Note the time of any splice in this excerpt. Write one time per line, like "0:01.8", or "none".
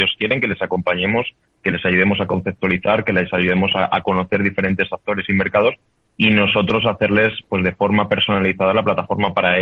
none